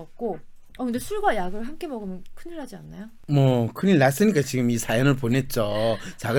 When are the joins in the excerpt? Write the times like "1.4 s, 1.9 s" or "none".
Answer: none